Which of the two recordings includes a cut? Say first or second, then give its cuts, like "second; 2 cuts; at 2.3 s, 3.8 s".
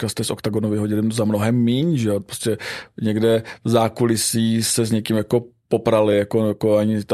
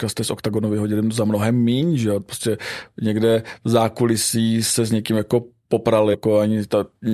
second; 1 cut; at 6.1 s